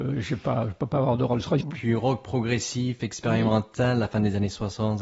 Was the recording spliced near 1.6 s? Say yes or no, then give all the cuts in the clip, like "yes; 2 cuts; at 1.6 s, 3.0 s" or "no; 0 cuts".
yes; 1 cut; at 1.6 s